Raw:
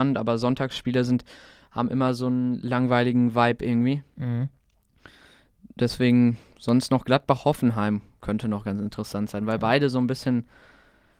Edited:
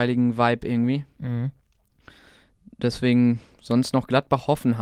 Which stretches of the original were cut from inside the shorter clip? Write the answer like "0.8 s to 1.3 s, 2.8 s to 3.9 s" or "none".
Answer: none